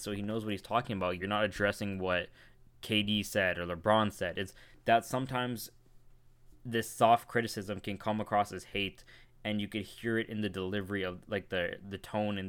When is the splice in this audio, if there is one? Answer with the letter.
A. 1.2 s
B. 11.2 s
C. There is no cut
A